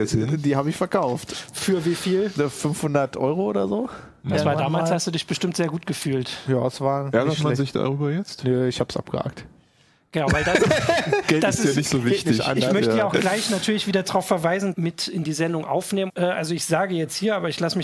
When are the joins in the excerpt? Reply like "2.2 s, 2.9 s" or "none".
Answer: 14.7 s, 16.1 s